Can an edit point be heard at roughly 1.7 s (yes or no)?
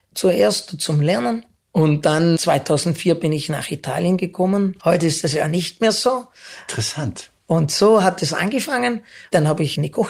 no